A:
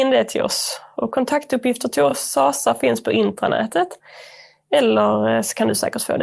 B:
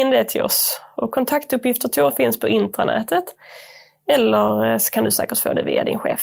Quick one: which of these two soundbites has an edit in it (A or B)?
B